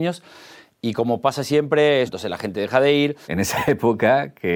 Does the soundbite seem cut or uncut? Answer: cut